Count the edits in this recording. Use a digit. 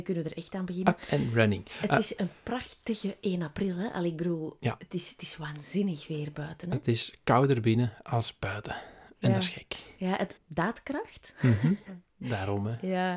2